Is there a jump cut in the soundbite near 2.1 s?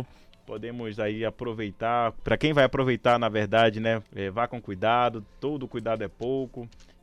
no; 1 cut; at 4.1 s

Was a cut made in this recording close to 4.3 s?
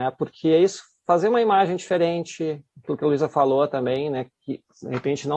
no; 0 cuts

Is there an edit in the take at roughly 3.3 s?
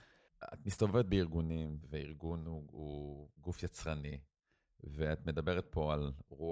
yes; 2 cuts; at 1.8 s, 3.3 s

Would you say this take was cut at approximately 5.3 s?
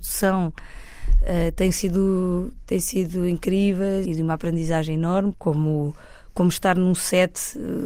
yes; 2 cuts; at 4.0 s, 5.3 s

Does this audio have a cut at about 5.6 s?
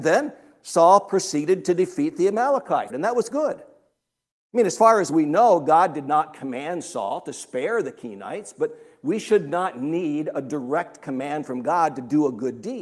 no; 1 cut; at 2.9 s

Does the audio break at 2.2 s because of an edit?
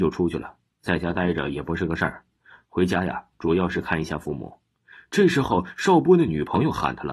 no; 0 cuts

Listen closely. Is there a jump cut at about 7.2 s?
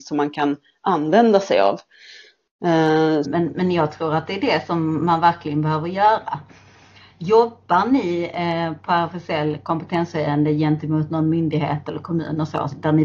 no; 1 cut; at 3.2 s

